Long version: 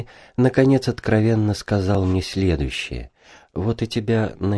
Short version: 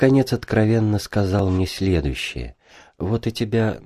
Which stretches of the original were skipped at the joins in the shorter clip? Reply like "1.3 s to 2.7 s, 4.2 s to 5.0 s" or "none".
none